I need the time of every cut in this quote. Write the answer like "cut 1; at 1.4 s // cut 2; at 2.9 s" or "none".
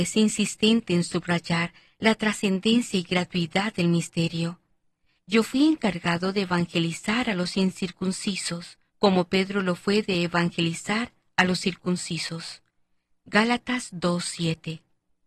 cut 1; at 5.2 s // cut 2; at 8.9 s